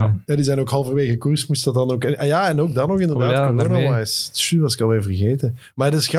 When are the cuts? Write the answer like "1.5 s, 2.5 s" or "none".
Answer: none